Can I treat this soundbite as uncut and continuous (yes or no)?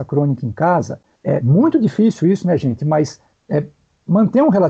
yes